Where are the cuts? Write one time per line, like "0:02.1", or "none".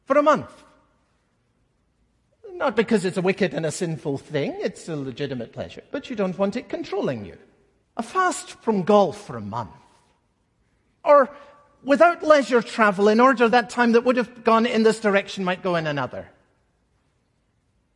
0:07.8
0:10.9
0:13.5